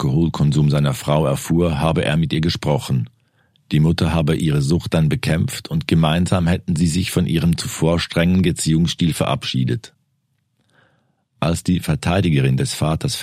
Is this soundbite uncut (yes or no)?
yes